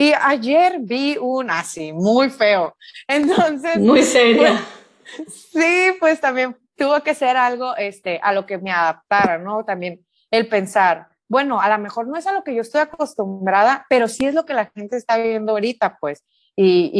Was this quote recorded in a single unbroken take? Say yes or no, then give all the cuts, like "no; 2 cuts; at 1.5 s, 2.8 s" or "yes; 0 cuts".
yes; 0 cuts